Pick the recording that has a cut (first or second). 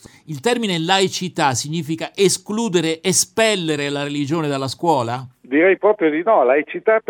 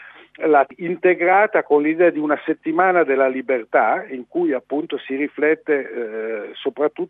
first